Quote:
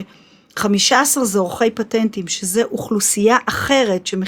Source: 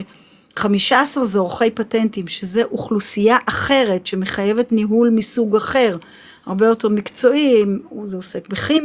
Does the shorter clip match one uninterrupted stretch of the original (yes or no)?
yes